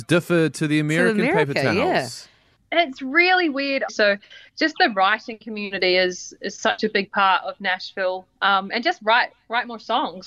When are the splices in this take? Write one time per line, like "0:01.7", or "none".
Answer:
0:03.9